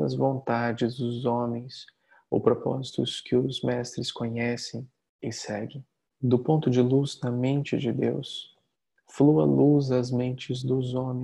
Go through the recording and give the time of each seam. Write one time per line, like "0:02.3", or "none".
0:06.1